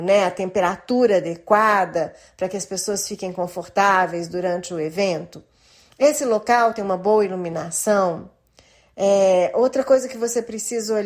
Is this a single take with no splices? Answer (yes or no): yes